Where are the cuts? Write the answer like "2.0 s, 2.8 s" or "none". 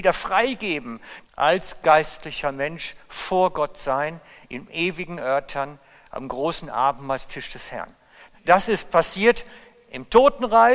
1.2 s, 8.3 s